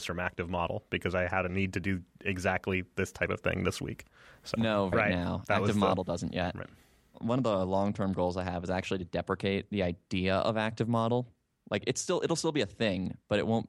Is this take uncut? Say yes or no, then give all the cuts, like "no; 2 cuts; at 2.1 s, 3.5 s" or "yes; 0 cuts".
no; 1 cut; at 4.9 s